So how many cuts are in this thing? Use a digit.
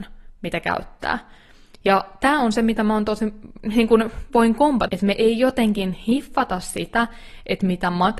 1